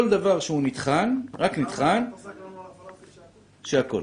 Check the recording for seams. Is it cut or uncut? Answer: cut